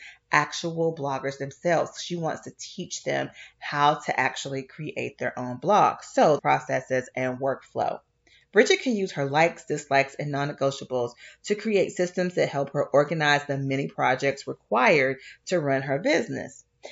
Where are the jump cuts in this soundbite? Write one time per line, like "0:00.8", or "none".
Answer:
0:06.4